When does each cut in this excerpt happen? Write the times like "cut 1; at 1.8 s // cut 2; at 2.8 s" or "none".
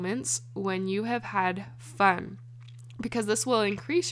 none